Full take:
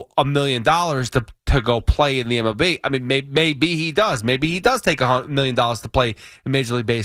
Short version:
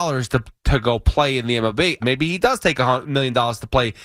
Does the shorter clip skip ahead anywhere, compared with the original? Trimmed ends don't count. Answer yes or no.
yes